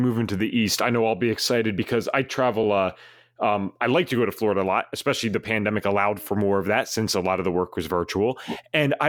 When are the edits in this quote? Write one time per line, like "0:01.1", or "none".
none